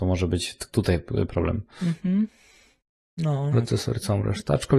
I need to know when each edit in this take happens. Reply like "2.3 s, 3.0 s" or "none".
3.5 s